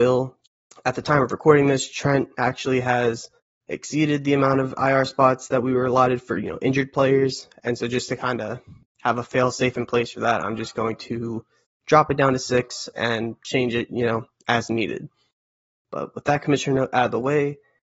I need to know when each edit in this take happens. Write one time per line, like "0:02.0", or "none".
none